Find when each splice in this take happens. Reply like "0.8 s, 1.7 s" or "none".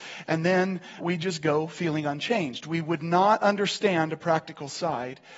1.0 s